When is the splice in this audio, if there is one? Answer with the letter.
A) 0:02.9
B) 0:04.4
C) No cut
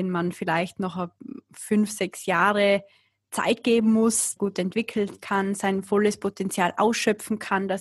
B